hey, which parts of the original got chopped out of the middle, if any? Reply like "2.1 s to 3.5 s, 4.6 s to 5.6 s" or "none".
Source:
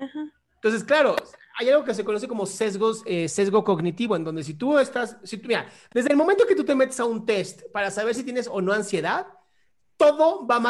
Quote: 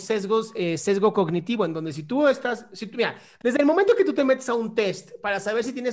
none